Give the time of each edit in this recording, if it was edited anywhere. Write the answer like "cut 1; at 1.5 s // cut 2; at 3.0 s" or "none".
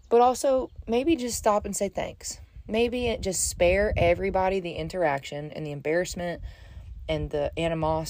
none